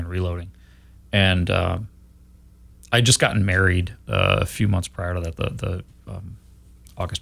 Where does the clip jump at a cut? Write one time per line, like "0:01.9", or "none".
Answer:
none